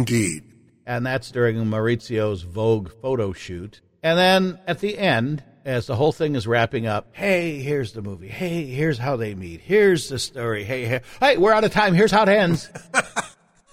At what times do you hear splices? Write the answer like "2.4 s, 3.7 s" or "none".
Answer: 7.1 s